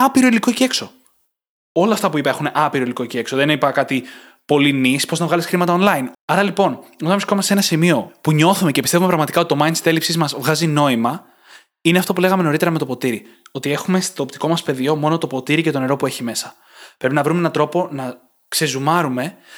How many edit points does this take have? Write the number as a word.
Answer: one